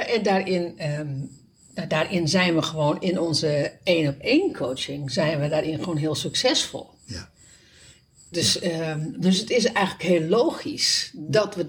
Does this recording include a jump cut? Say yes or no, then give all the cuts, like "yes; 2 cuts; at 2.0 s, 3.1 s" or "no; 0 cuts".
no; 0 cuts